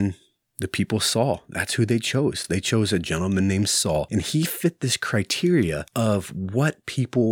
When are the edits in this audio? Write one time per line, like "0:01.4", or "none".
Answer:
none

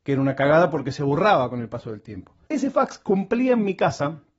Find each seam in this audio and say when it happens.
0:02.5

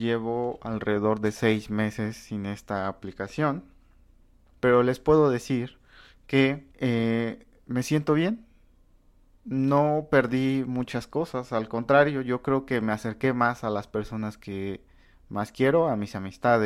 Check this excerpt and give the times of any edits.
0:04.5
0:06.7

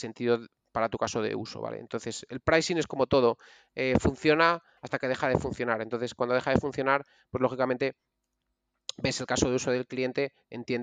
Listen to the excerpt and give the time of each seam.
none

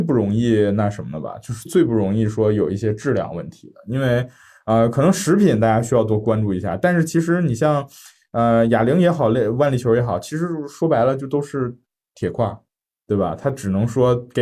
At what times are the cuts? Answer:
0:01.7

